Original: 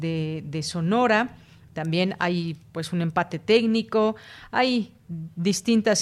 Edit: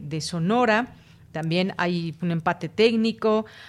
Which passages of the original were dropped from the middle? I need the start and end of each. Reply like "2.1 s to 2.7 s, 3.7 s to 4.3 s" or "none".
2.6 s to 2.9 s